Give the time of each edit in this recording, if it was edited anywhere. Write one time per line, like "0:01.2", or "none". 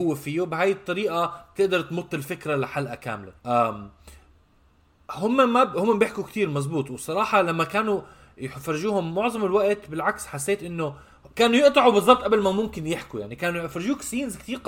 0:03.4